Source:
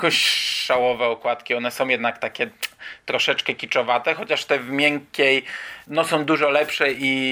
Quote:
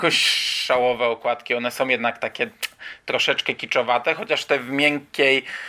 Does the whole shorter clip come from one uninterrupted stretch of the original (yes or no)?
yes